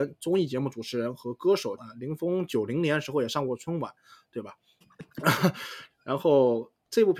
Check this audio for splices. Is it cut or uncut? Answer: cut